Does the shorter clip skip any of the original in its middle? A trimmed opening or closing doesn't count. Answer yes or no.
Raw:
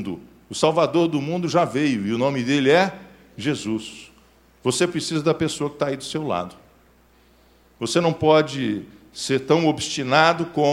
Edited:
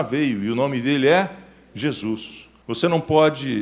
yes